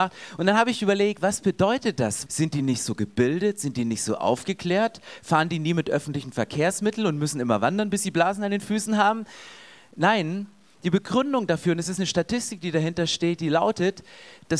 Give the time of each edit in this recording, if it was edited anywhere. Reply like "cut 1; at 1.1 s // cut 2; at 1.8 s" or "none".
cut 1; at 2.3 s